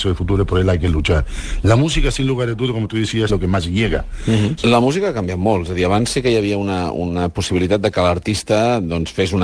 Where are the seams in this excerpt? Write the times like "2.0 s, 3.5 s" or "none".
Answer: 3.3 s, 4.6 s